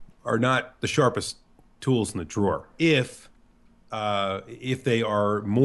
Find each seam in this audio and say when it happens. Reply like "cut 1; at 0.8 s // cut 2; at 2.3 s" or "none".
cut 1; at 2.7 s